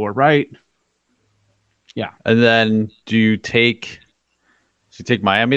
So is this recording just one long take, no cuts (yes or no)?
yes